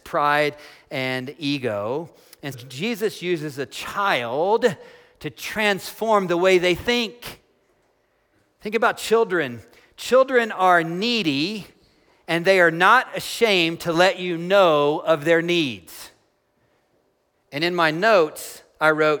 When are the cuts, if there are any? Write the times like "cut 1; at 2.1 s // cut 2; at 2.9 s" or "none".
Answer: cut 1; at 2.5 s